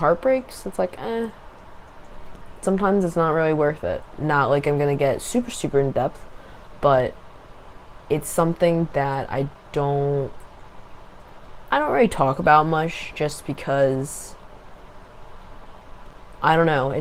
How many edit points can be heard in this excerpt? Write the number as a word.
one